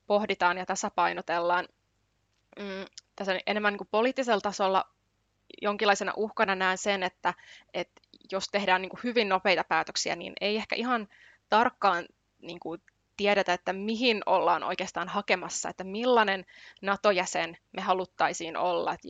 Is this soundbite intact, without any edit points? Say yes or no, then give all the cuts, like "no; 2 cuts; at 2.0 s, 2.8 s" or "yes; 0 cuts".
yes; 0 cuts